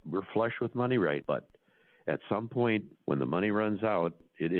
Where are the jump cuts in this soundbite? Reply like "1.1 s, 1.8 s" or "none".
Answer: 1.2 s, 2.9 s